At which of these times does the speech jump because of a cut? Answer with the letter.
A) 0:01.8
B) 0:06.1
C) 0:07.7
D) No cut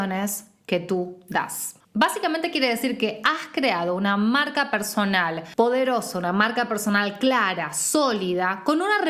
A